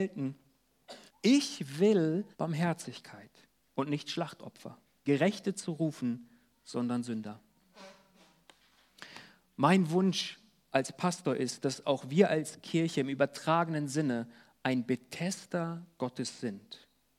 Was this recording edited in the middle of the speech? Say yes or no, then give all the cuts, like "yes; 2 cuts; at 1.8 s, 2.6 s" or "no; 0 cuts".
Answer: yes; 3 cuts; at 1.1 s, 2.3 s, 5.1 s